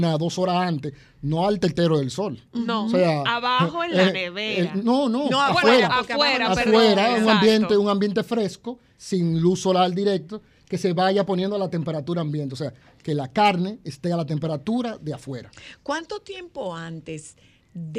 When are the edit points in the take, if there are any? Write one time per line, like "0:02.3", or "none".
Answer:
none